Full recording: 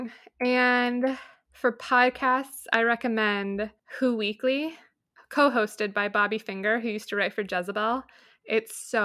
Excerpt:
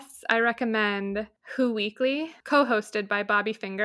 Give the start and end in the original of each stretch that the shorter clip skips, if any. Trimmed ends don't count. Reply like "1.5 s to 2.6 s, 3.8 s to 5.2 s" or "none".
4.8 s to 5.3 s